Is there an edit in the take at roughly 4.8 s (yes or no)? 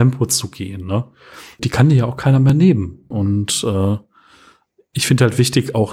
no